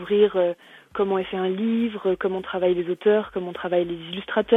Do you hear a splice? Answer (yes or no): no